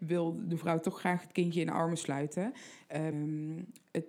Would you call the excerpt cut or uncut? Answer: cut